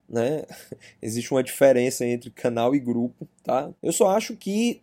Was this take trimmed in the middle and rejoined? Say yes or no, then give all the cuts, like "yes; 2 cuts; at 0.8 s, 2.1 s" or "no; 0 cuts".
yes; 1 cut; at 3.8 s